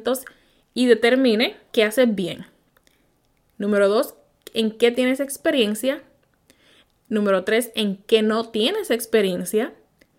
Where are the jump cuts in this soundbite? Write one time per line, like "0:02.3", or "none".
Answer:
0:01.7